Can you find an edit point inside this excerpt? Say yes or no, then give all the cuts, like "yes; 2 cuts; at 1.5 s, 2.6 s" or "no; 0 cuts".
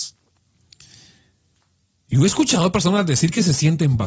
no; 0 cuts